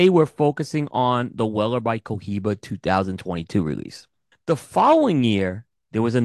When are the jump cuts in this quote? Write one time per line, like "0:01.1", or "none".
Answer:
0:04.3